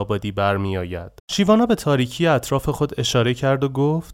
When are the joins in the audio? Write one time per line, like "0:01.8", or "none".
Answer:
0:01.2